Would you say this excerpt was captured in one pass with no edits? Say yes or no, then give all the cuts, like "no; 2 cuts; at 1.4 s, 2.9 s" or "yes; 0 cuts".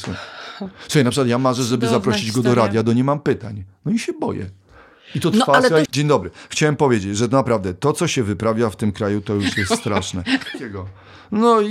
no; 2 cuts; at 5.9 s, 10.5 s